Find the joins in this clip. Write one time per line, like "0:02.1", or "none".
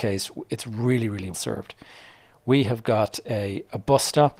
0:01.3